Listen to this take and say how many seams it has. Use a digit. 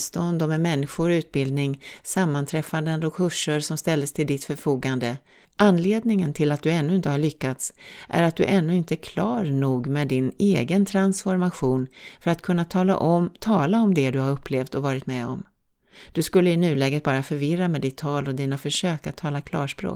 1